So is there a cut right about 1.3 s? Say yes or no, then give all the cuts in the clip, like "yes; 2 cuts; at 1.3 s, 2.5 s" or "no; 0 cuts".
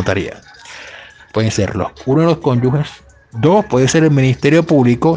yes; 1 cut; at 1.3 s